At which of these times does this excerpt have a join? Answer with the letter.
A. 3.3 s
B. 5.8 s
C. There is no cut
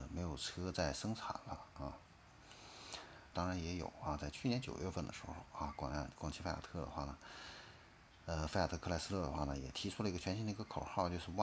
A